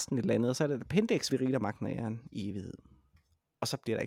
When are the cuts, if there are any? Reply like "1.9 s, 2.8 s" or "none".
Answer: 1.3 s